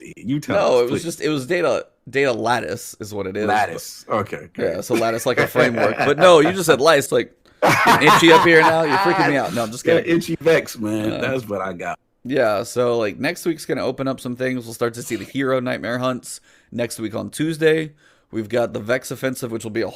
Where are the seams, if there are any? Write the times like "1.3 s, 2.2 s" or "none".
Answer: 7.1 s, 12.2 s